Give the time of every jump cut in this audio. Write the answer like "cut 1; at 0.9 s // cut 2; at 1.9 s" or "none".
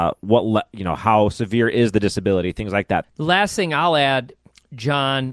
cut 1; at 3.0 s